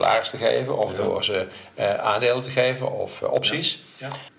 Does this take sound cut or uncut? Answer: uncut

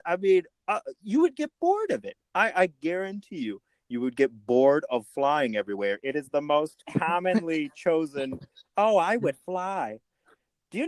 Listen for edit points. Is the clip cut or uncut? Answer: cut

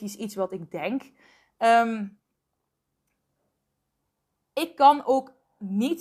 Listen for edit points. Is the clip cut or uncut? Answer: uncut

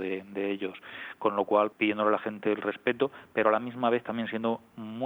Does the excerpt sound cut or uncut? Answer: cut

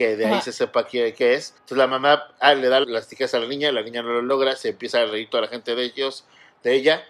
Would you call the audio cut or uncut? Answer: cut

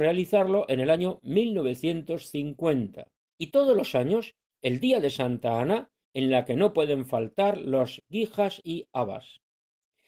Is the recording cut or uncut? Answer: cut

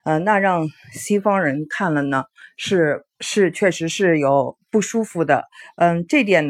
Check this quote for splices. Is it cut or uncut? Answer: uncut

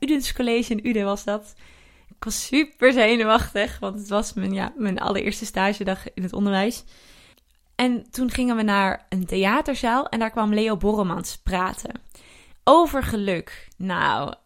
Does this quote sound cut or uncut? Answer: uncut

